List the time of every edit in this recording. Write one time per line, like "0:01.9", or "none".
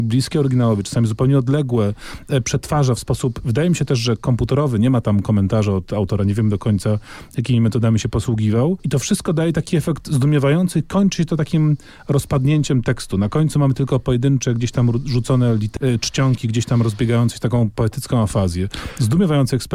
0:15.8

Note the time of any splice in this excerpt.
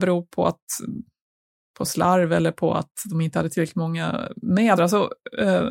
0:04.8

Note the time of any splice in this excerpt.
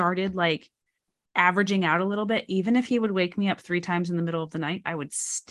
none

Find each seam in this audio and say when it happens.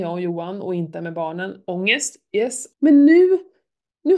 0:02.7

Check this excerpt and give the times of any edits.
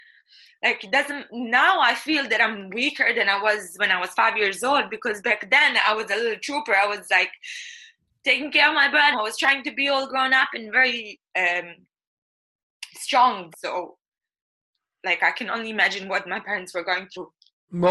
0:09.1
0:13.5

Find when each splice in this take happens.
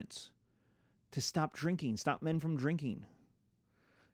none

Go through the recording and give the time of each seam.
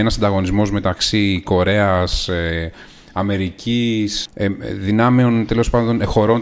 0:04.3

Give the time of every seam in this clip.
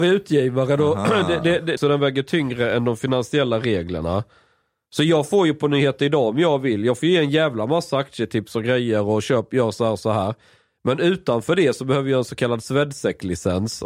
0:01.8

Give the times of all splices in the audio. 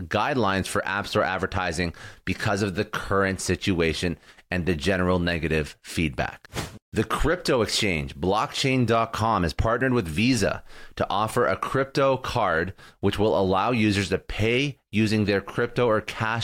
none

